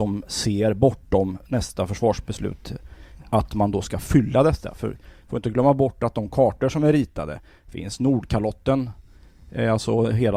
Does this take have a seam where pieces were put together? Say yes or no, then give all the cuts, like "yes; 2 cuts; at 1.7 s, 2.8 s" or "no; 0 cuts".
no; 0 cuts